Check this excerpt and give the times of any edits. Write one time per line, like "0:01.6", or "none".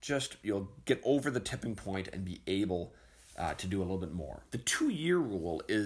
0:04.5